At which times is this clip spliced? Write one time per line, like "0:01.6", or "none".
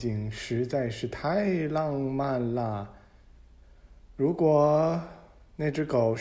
none